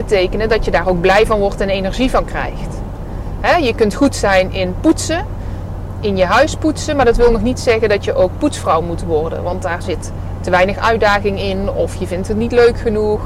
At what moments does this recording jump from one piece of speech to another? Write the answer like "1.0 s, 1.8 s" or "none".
none